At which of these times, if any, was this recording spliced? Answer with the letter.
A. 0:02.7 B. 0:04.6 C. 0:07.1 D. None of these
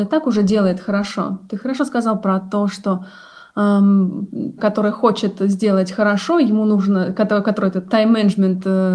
B